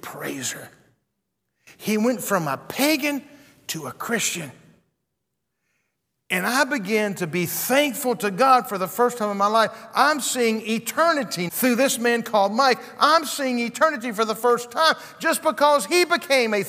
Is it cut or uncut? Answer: cut